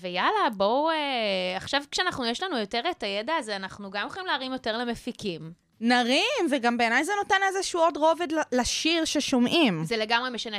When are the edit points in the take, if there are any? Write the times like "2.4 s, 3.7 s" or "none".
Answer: none